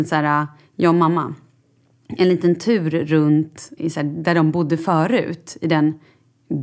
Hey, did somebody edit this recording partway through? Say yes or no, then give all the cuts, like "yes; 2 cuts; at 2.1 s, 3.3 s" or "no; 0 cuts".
yes; 1 cut; at 3.8 s